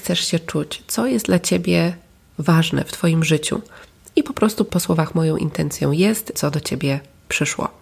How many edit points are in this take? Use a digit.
1